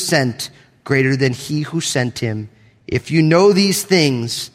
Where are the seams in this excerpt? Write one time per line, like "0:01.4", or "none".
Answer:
none